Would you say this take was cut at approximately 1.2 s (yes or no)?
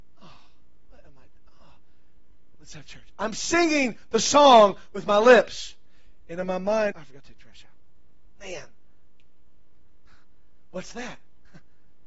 no